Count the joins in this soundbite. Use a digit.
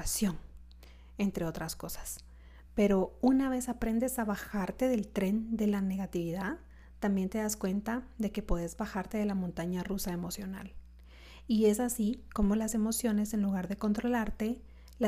0